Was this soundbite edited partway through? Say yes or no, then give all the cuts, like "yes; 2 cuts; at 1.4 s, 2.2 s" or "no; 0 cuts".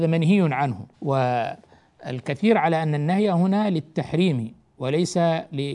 yes; 1 cut; at 0.9 s